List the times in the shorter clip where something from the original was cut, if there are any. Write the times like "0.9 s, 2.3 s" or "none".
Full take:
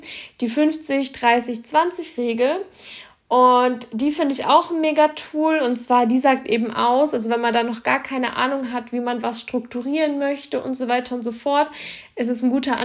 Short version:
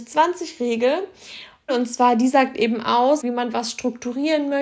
1.7 s, 3.2 s